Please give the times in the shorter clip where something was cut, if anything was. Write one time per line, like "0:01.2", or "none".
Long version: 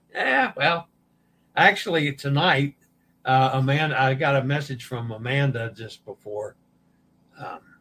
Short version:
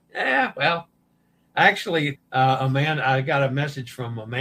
0:02.1